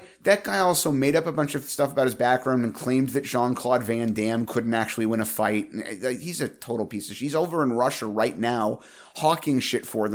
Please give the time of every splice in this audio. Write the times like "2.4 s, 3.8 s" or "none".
none